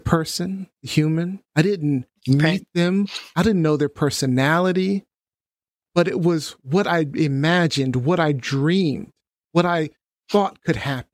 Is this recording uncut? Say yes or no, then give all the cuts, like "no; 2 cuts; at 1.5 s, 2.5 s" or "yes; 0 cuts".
no; 1 cut; at 1.5 s